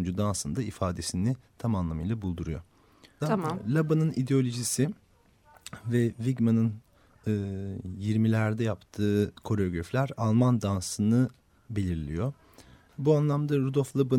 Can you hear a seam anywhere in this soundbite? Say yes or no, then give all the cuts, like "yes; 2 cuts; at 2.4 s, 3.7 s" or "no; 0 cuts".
yes; 2 cuts; at 3.2 s, 12.9 s